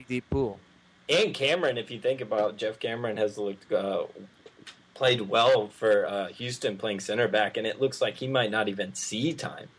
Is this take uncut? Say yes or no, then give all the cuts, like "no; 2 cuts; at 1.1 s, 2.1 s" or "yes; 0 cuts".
yes; 0 cuts